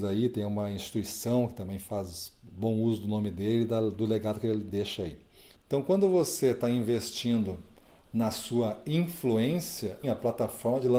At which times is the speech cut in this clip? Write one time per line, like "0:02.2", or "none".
0:05.5
0:10.0